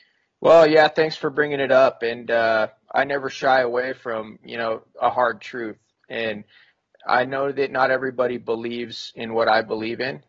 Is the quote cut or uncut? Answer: uncut